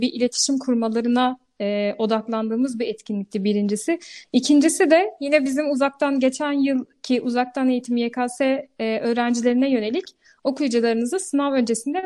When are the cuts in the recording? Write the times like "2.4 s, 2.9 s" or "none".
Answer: none